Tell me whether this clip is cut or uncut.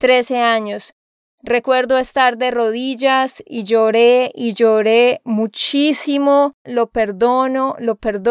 cut